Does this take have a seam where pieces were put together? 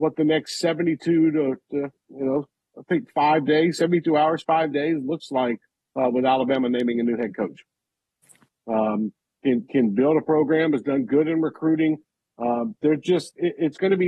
yes; 1 cut; at 8.5 s

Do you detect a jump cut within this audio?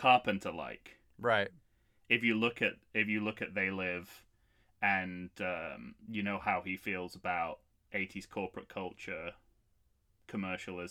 no; 0 cuts

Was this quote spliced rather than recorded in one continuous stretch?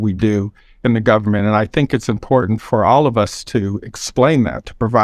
no; 0 cuts

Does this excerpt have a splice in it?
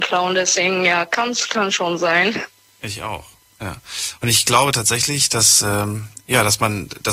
no; 0 cuts

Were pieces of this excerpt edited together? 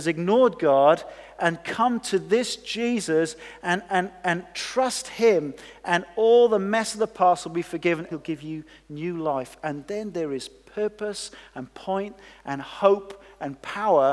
yes; 1 cut; at 8.1 s

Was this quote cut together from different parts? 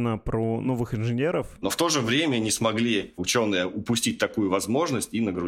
yes; 1 cut; at 1.6 s

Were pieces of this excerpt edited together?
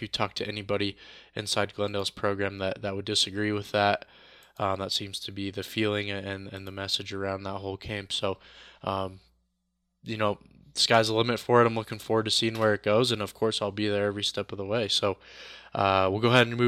no; 0 cuts

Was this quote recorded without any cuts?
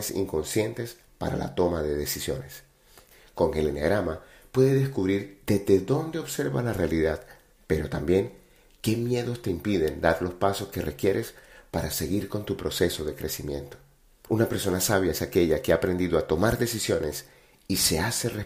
no; 1 cut; at 14.3 s

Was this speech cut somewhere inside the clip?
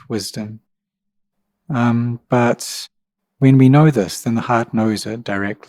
no; 0 cuts

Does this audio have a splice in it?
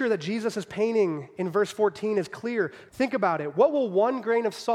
yes; 1 cut; at 2.9 s

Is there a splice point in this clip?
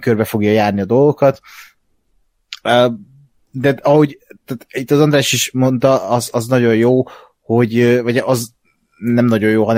no; 0 cuts

